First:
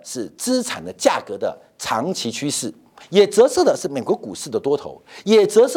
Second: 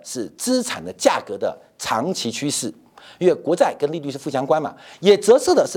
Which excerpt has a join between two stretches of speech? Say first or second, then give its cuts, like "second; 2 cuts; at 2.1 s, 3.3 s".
first; 1 cut; at 3.0 s